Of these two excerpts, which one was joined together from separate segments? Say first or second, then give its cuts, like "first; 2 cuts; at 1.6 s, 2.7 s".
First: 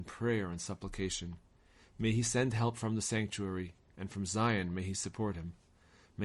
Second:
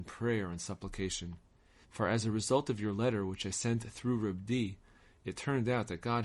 second; 1 cut; at 1.8 s